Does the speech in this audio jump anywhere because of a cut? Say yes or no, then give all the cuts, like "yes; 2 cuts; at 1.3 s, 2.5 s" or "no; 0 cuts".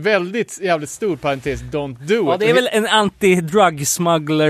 no; 0 cuts